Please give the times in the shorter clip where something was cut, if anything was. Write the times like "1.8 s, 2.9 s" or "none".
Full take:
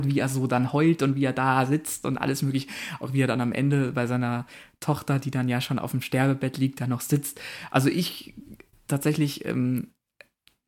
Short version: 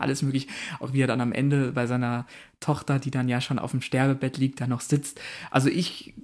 none